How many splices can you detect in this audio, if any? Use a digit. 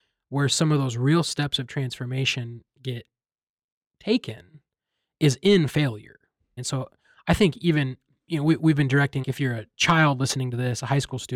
2